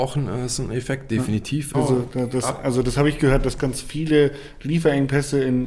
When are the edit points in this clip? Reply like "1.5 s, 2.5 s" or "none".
1.7 s, 3.6 s